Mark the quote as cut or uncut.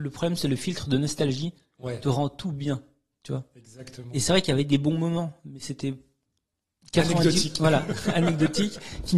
uncut